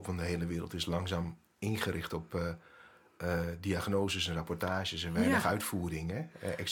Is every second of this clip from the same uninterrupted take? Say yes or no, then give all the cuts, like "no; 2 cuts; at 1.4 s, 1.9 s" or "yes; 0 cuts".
yes; 0 cuts